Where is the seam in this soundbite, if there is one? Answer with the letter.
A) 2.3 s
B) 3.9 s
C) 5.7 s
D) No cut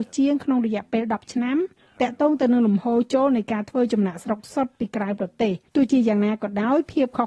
C